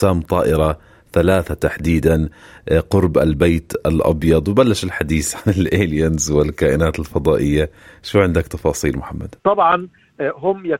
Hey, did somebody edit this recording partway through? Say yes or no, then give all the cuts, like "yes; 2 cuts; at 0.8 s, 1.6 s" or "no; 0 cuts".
yes; 1 cut; at 9.4 s